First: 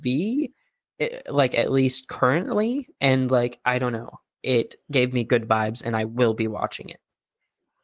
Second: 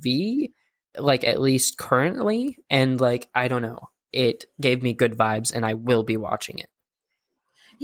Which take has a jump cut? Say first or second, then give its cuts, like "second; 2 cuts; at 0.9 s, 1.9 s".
second; 1 cut; at 0.9 s